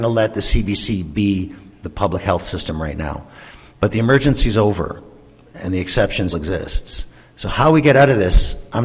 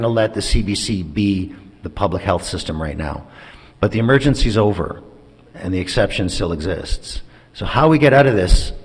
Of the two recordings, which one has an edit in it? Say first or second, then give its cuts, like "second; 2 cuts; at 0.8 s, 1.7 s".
first; 1 cut; at 6.3 s